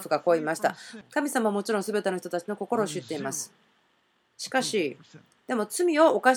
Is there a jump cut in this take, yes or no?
yes